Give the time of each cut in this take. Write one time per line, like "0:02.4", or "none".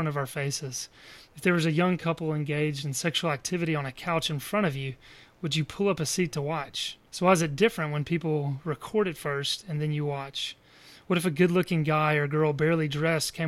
0:07.1